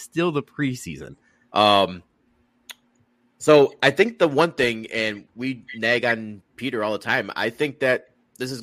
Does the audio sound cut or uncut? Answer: cut